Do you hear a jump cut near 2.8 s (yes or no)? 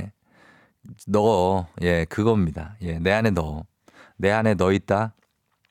no